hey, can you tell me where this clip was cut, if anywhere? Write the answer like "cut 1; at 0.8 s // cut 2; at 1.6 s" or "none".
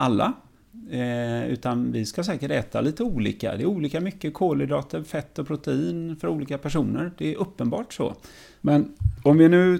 cut 1; at 8.6 s